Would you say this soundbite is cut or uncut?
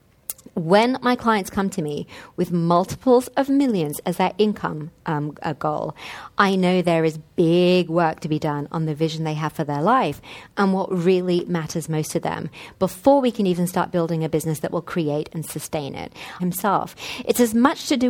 cut